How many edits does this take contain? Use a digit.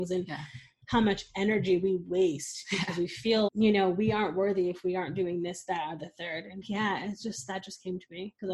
2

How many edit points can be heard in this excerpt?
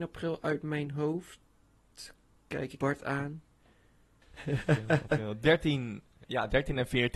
1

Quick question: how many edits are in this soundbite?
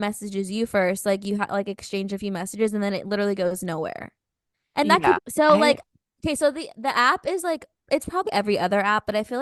2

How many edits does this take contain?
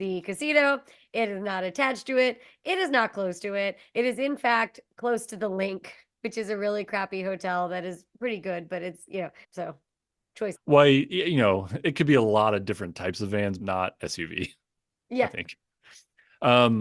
3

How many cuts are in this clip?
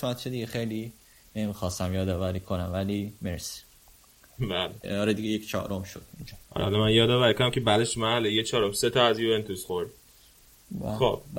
2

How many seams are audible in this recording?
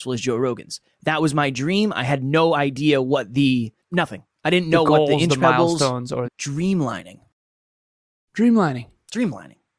2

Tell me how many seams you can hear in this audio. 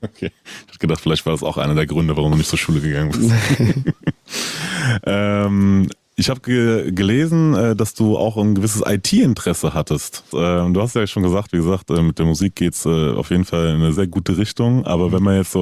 2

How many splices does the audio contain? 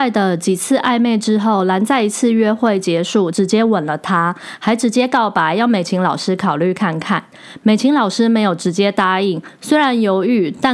1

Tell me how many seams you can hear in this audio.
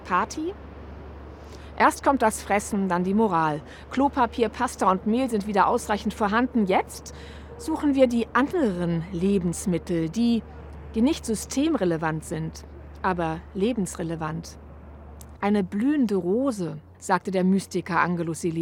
2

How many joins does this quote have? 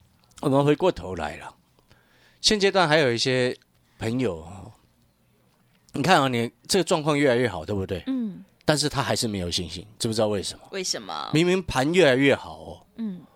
0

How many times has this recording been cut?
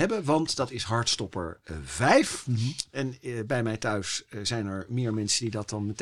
0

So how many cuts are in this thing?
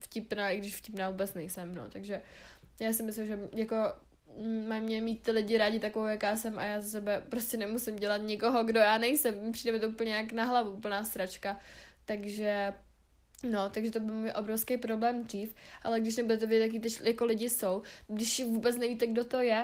2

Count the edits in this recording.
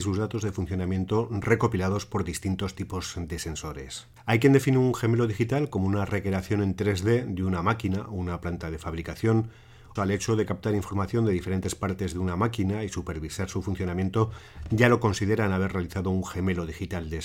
2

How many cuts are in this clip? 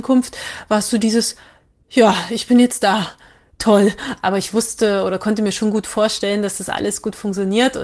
1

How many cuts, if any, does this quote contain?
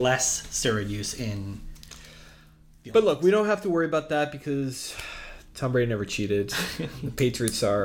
0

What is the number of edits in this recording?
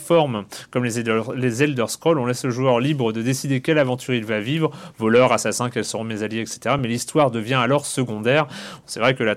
0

